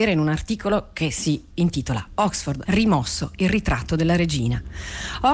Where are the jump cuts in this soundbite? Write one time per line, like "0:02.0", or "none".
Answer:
0:02.6